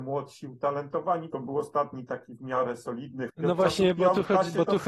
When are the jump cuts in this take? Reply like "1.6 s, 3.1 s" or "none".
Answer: 1.3 s, 3.3 s